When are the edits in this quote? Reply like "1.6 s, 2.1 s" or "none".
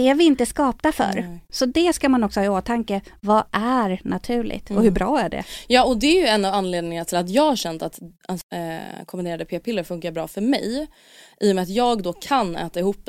8.4 s

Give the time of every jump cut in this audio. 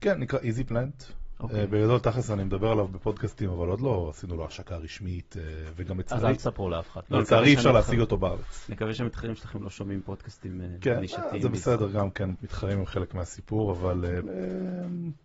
12.3 s, 14.2 s

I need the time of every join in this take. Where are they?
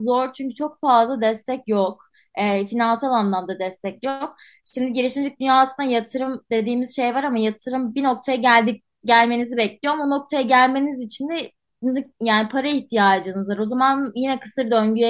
none

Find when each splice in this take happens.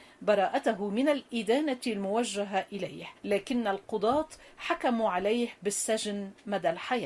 3.2 s

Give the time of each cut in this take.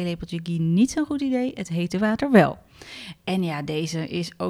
none

